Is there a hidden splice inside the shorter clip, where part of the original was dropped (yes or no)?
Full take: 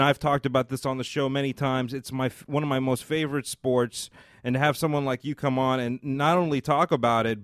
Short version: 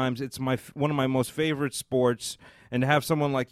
no